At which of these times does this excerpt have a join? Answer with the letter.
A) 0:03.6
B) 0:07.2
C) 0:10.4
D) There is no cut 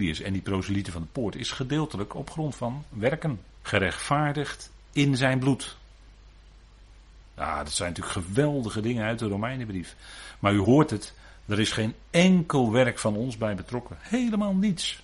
A